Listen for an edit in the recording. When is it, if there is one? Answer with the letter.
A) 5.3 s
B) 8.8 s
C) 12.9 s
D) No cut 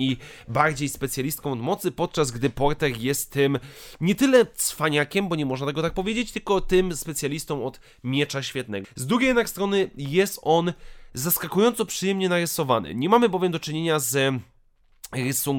B